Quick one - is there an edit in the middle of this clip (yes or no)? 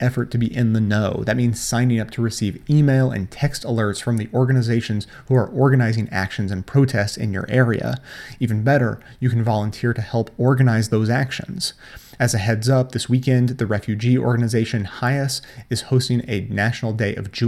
no